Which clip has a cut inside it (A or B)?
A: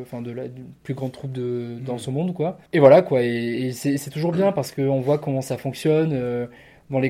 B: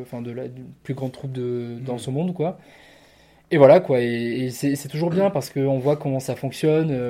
A